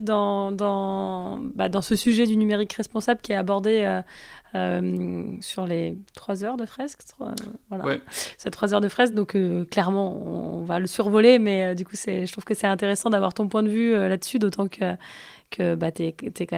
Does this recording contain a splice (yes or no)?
no